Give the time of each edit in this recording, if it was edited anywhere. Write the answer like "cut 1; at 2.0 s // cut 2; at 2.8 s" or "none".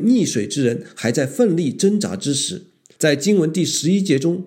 cut 1; at 2.9 s